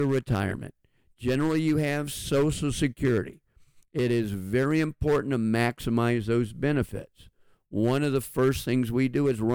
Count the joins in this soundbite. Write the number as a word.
zero